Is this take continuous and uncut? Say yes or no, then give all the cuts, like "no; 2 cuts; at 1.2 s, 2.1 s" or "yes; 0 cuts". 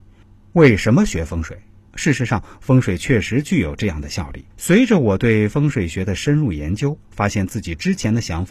no; 2 cuts; at 1.9 s, 4.5 s